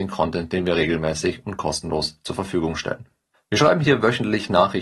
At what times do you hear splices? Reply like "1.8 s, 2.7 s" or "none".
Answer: 3.3 s